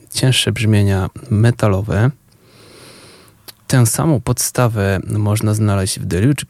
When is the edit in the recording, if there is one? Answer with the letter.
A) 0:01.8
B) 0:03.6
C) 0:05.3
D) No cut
B